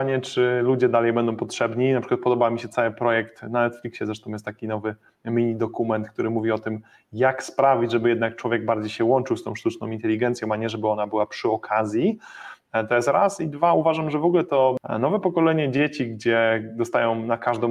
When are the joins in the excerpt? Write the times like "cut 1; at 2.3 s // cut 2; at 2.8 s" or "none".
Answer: none